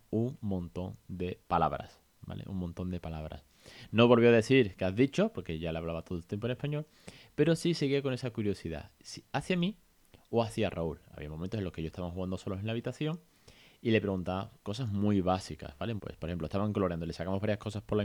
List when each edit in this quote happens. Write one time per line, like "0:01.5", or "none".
0:16.0